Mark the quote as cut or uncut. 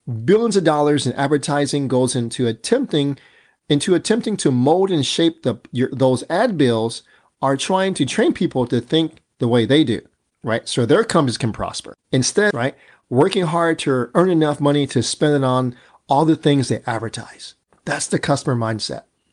cut